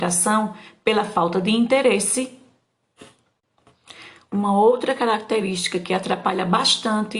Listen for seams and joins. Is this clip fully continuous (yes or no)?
yes